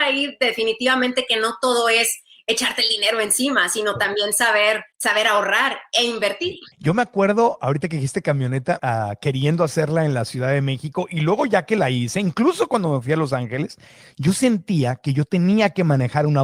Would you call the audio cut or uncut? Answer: cut